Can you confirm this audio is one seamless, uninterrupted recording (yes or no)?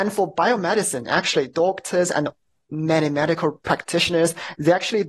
yes